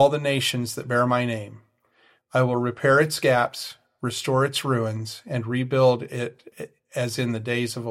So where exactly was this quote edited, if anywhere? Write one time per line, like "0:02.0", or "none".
0:02.2

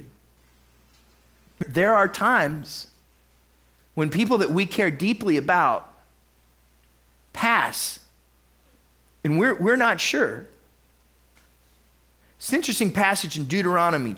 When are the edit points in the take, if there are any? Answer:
0:01.6

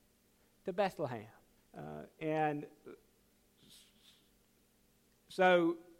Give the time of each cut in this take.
0:01.6

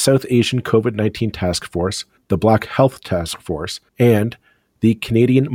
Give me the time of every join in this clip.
0:02.2
0:03.9

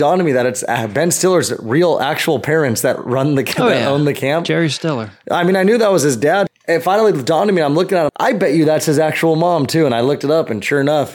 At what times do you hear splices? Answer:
0:06.5
0:08.1

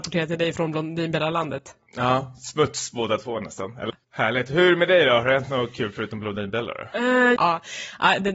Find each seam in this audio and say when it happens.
0:03.9
0:07.4

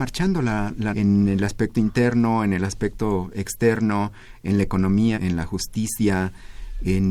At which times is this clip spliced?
0:00.9
0:05.1

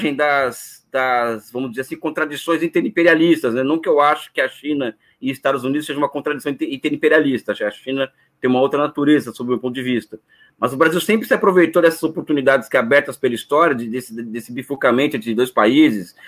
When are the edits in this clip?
none

